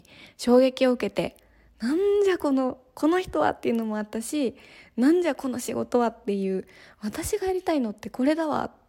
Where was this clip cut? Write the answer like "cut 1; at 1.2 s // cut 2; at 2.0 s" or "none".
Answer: none

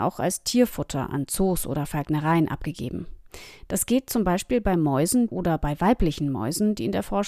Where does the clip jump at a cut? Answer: cut 1; at 5.3 s

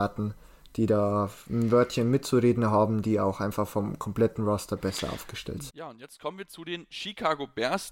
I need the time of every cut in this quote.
cut 1; at 5.7 s

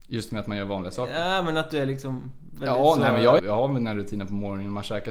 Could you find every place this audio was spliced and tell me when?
cut 1; at 3.4 s

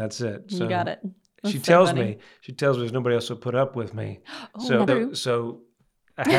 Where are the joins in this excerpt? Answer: cut 1; at 4.9 s

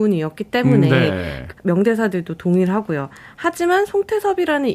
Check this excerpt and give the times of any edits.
cut 1; at 1.5 s

